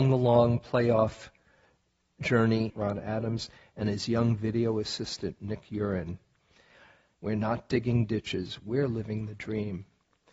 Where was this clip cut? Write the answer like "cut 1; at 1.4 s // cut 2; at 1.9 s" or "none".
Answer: cut 1; at 2.7 s // cut 2; at 7.1 s

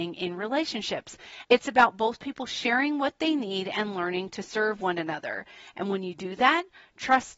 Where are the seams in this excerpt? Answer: cut 1; at 1.4 s

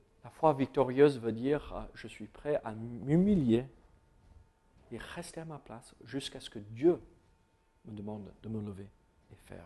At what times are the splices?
none

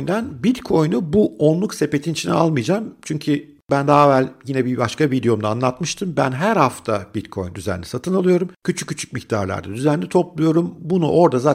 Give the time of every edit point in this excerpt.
none

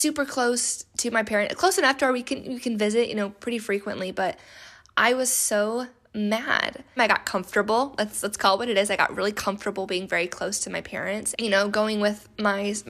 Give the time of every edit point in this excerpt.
cut 1; at 7.0 s // cut 2; at 11.3 s

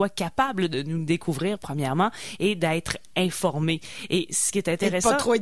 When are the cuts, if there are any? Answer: none

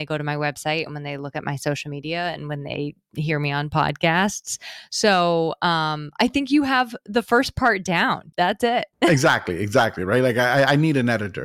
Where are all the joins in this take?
cut 1; at 8.3 s

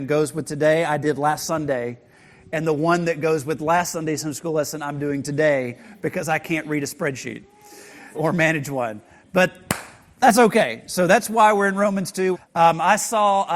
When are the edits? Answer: cut 1; at 8.1 s // cut 2; at 12.3 s

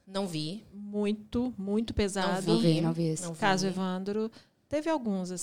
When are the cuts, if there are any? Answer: none

